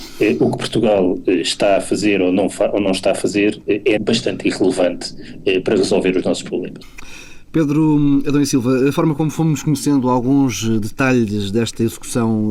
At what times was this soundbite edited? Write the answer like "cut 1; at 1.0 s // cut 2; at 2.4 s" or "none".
cut 1; at 4.0 s // cut 2; at 6.8 s

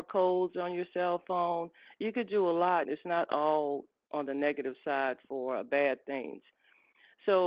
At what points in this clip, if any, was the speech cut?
cut 1; at 2.8 s

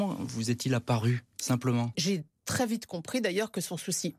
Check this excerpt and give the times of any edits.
cut 1; at 1.9 s

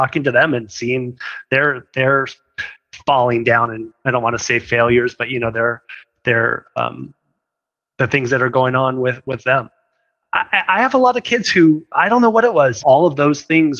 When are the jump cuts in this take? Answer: cut 1; at 12.8 s

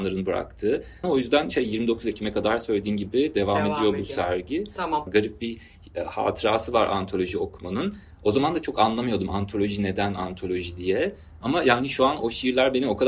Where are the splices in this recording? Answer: cut 1; at 1.0 s // cut 2; at 5.1 s // cut 3; at 11.4 s

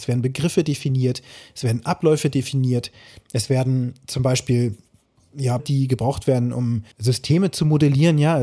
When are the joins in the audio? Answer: cut 1; at 5.6 s // cut 2; at 6.9 s

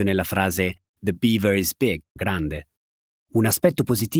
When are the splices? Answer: cut 1; at 2.2 s

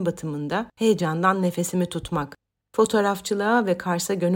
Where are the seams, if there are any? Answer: cut 1; at 2.6 s

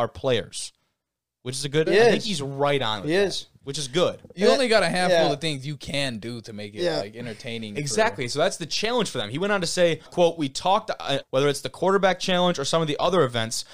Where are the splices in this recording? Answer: cut 1; at 1.9 s // cut 2; at 10.1 s // cut 3; at 11.2 s

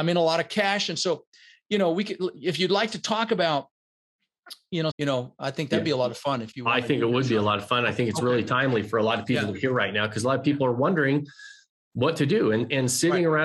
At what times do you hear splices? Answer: cut 1; at 4.9 s

